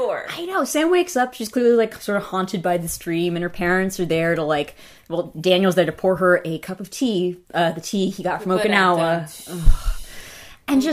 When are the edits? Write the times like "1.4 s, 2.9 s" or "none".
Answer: 7.4 s